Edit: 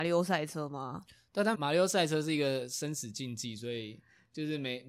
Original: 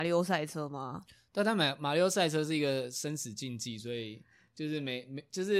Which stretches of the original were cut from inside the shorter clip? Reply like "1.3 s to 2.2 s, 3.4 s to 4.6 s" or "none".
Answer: 1.5 s to 1.8 s